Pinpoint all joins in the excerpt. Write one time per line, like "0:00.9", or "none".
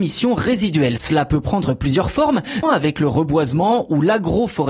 0:01.0
0:02.6